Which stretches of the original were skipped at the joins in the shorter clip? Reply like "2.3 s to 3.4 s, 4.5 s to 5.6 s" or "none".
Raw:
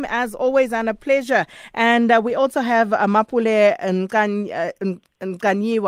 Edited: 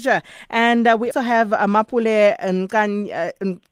2.3 s to 2.5 s